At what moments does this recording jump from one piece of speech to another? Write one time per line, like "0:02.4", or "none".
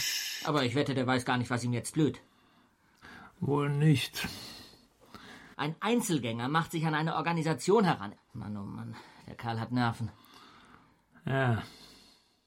0:05.5
0:08.2